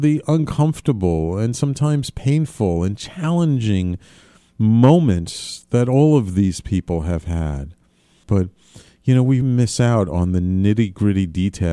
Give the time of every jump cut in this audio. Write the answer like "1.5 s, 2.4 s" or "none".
8.2 s, 9.4 s